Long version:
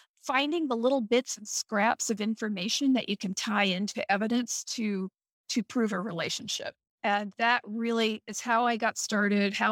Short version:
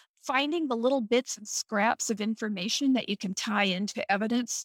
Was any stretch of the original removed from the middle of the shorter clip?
no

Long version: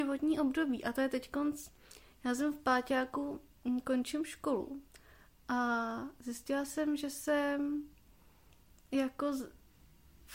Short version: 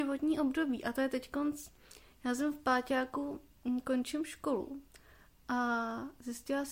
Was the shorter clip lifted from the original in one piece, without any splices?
yes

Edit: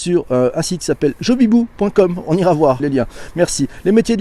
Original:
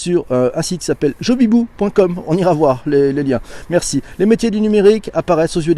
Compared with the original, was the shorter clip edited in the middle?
yes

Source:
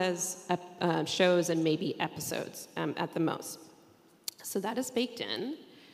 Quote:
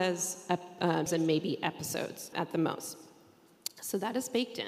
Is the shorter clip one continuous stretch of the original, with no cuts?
no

